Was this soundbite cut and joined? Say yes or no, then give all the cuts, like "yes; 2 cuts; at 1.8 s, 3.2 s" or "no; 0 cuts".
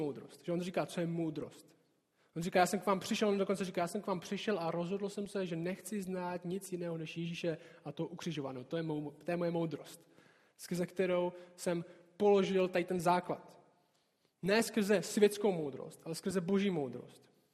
no; 0 cuts